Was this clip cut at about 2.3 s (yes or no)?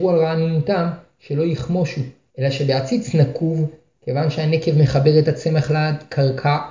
yes